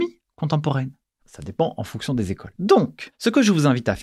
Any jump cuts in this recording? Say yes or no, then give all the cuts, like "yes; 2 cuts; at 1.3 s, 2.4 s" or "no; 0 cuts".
yes; 2 cuts; at 1.2 s, 2.5 s